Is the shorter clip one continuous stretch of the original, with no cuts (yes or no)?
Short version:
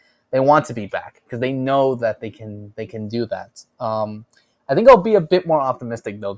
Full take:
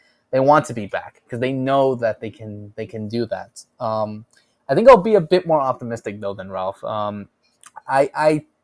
yes